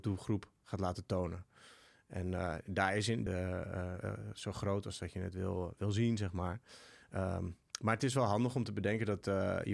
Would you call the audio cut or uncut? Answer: cut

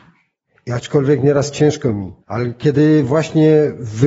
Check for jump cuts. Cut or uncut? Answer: cut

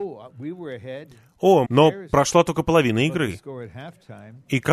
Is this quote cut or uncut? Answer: cut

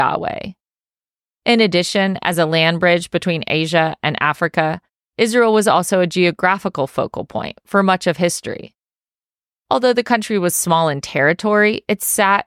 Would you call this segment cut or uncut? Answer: uncut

